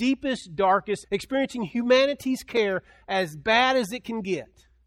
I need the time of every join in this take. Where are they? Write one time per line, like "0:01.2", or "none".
0:01.0